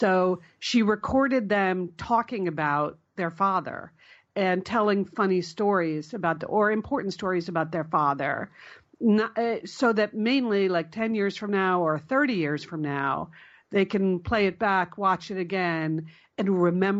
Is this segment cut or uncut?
uncut